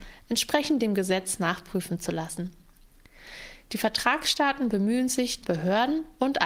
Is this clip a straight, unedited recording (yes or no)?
no